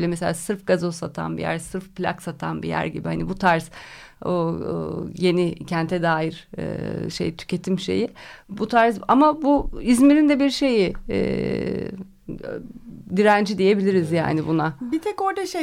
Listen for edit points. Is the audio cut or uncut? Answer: uncut